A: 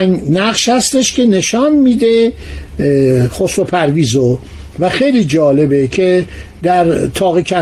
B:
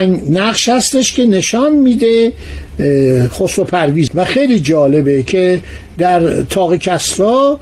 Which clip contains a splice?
B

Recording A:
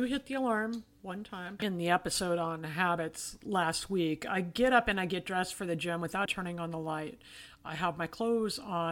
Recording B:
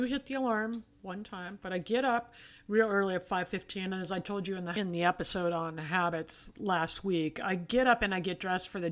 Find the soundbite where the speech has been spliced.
A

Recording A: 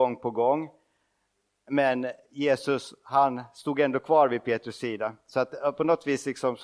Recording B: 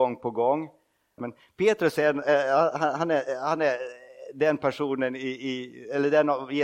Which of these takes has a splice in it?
B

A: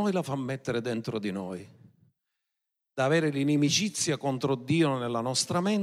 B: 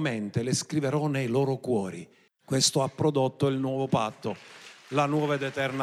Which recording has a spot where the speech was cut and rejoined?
B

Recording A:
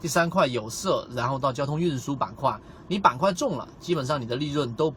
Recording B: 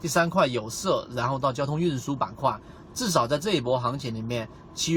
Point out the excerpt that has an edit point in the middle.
B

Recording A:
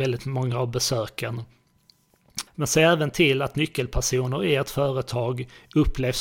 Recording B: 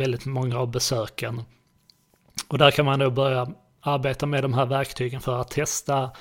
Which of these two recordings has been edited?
A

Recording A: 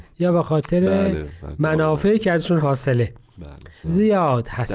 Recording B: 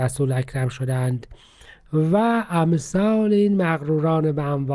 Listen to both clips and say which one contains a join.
A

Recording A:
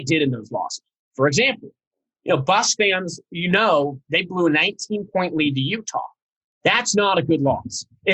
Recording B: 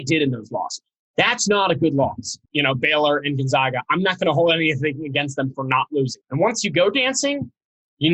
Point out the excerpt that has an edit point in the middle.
B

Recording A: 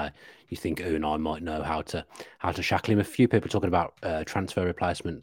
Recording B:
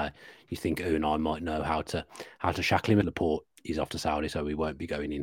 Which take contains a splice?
B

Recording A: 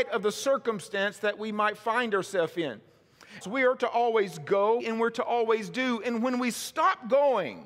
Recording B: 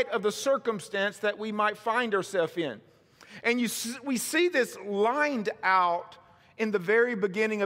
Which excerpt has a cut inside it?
A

